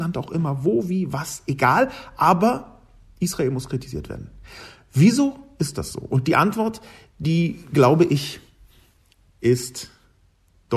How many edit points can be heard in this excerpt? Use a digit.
0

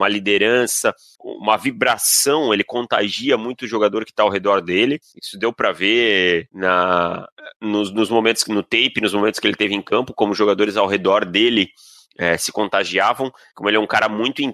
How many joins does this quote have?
1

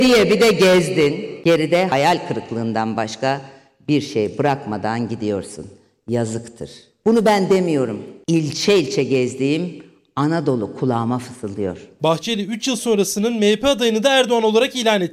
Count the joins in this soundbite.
0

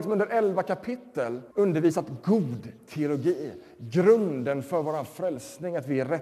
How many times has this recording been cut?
1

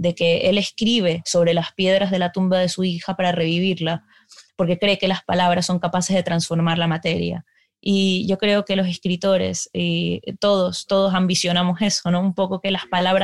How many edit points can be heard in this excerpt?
0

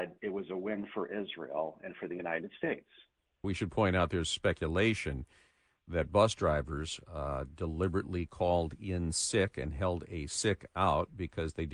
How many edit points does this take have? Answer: 1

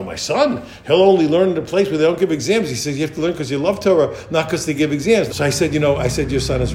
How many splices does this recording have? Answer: 1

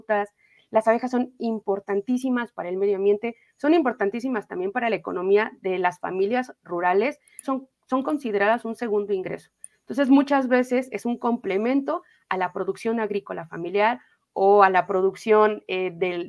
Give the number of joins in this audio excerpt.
1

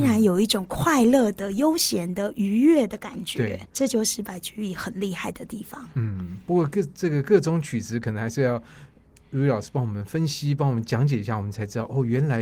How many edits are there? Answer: 1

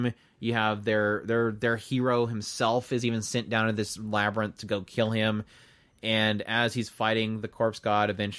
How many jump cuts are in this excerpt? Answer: 0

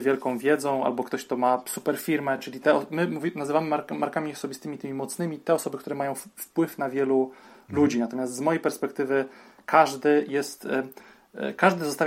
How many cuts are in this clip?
0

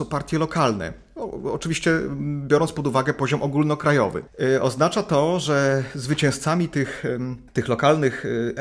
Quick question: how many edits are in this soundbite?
1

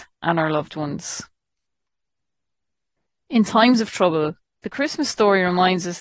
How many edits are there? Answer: 1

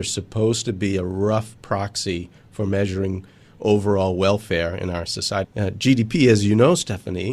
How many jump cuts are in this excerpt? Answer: 1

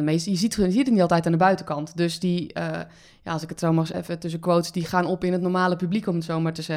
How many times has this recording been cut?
1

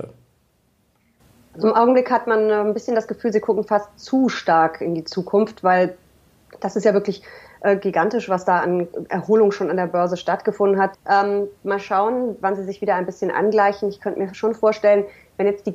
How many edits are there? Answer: 1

